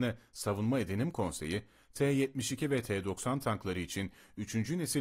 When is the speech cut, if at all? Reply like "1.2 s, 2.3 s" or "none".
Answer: none